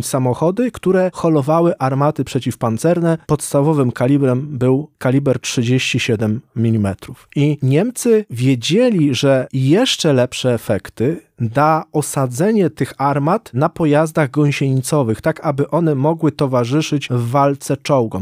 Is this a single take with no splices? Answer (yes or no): yes